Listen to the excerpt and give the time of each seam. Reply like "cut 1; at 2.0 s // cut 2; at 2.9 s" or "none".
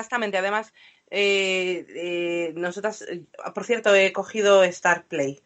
none